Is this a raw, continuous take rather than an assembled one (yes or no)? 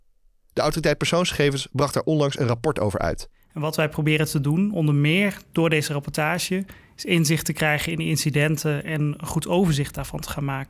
yes